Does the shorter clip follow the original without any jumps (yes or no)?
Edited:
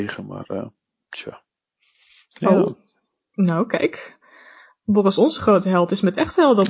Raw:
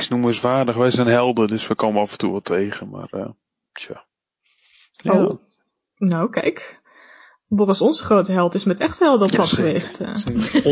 yes